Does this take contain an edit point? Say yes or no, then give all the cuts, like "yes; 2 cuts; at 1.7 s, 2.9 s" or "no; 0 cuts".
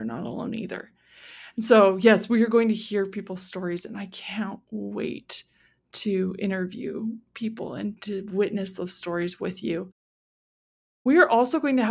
no; 0 cuts